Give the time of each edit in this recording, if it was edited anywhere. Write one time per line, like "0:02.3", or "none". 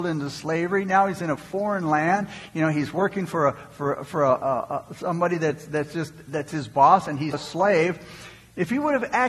0:07.3